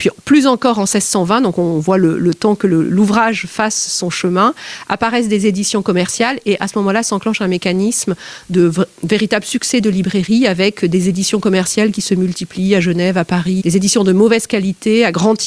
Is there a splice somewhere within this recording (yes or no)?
yes